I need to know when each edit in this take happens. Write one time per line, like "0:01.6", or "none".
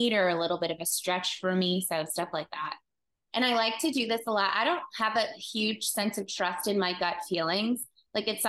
0:03.3